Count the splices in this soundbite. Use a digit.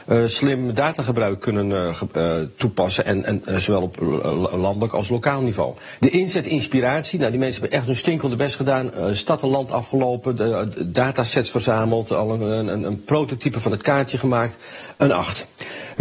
1